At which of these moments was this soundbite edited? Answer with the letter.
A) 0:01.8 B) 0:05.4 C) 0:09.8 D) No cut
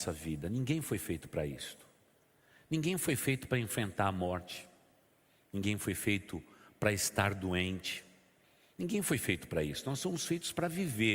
D